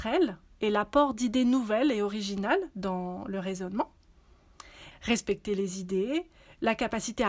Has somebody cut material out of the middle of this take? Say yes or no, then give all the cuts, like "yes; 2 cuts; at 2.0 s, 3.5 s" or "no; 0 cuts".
yes; 1 cut; at 4.9 s